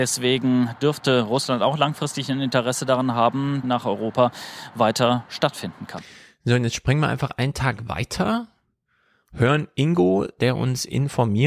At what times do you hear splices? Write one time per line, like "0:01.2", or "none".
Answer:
0:03.6